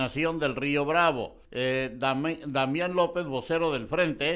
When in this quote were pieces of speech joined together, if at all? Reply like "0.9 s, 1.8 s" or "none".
1.4 s

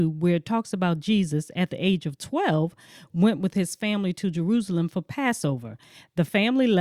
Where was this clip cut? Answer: none

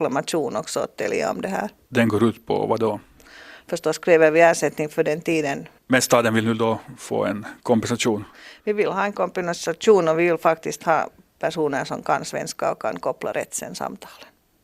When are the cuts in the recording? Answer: 5.8 s

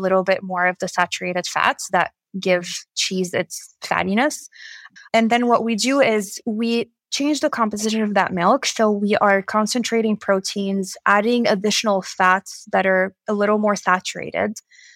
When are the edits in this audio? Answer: 5.0 s

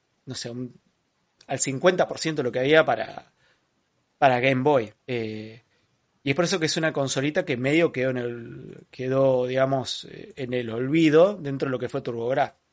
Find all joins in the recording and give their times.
5.0 s

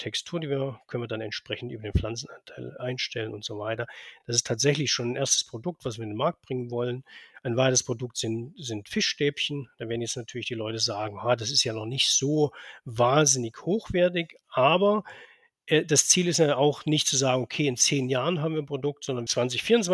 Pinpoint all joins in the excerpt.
none

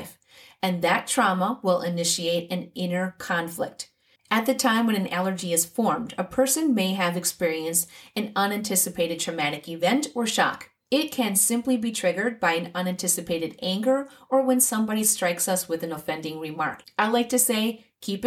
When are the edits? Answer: 4.2 s, 16.8 s

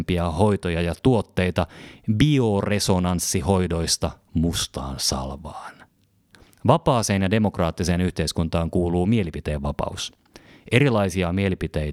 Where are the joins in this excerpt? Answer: none

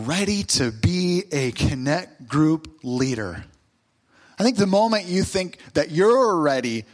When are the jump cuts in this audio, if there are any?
none

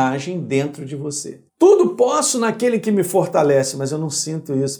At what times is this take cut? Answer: 1.5 s

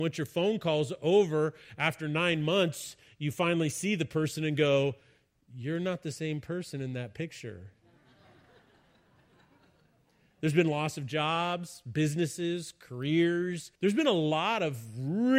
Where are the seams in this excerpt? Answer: 13.8 s

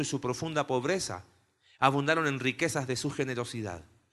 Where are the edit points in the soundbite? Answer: none

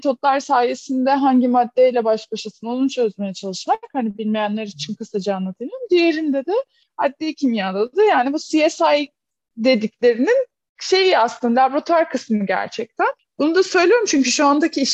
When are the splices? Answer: none

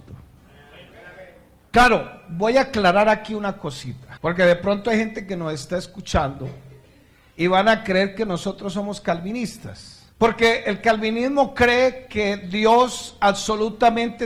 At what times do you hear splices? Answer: 4.2 s, 10.1 s

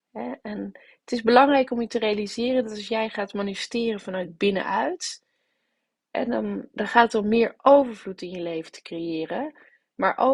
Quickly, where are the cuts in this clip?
none

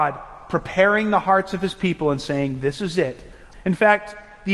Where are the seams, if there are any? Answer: 3.5 s

